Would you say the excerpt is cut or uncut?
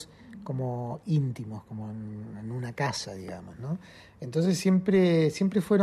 uncut